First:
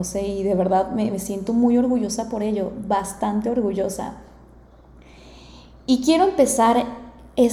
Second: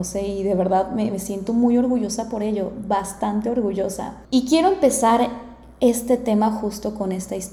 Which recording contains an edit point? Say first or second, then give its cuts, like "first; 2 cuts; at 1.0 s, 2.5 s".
second; 1 cut; at 4.3 s